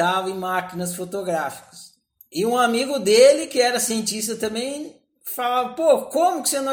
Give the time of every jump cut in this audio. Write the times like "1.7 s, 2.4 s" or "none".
2.2 s